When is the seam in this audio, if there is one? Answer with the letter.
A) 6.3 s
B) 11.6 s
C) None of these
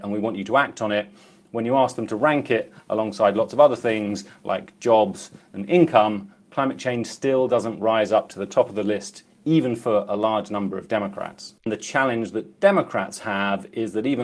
B